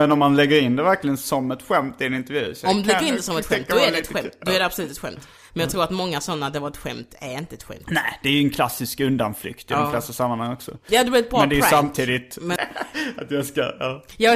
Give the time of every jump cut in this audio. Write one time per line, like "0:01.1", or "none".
0:10.9
0:12.6